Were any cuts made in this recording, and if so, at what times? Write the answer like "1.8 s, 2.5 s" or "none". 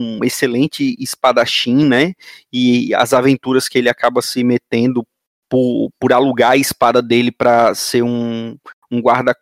none